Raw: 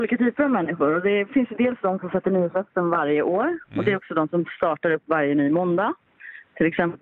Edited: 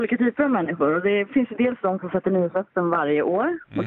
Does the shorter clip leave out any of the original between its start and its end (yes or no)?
no